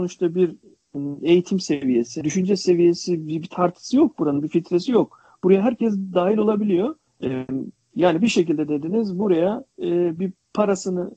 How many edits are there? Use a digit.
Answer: 3